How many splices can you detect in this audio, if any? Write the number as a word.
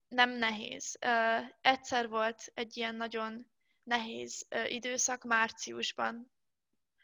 zero